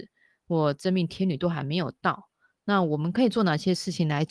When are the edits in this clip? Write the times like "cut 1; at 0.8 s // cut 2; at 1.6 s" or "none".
none